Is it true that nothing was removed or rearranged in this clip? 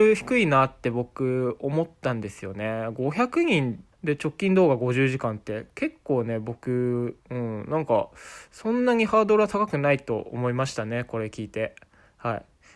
no; 2 cuts; at 3.9 s, 7.2 s

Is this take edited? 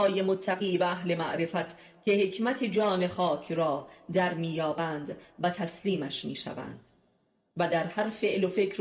no; 0 cuts

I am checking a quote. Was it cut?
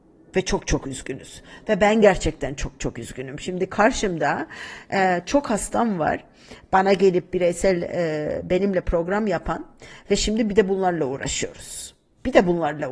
no; 0 cuts

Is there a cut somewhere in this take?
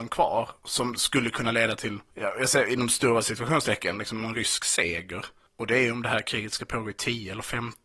no; 0 cuts

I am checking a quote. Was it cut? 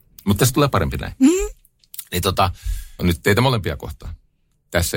yes; 1 cut; at 3.0 s

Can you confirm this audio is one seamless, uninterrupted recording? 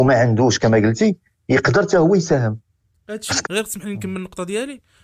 no; 1 cut; at 3.4 s

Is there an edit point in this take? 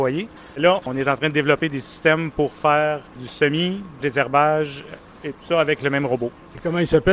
yes; 1 cut; at 4.0 s

